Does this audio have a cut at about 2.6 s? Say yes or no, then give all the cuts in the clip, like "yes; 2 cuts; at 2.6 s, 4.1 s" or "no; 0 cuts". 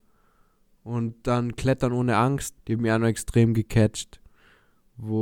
yes; 1 cut; at 2.6 s